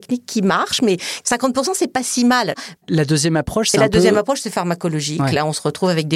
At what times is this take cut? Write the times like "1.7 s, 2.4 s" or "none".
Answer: 2.8 s